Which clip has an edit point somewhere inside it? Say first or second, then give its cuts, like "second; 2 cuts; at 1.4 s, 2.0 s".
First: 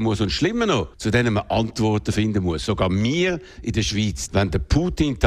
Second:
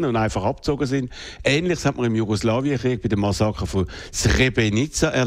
first; 2 cuts; at 0.9 s, 4.3 s